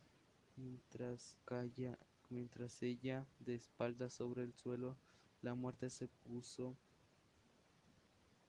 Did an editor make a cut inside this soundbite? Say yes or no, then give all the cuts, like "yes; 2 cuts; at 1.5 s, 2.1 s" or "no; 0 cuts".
yes; 1 cut; at 1.4 s